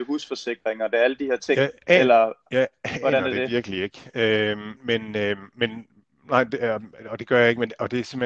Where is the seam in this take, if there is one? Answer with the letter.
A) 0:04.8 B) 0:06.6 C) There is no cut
A